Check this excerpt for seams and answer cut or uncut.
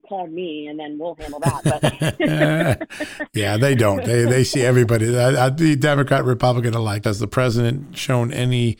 cut